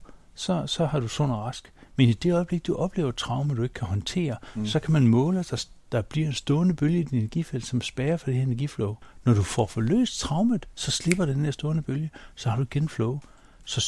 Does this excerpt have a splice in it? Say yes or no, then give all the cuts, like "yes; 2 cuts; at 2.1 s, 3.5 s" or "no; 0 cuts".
no; 0 cuts